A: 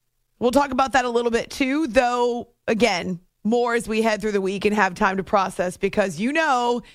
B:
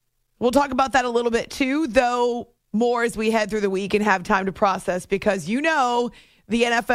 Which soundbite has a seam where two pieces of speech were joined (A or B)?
B